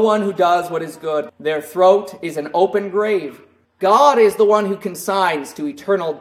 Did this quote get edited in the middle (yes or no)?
yes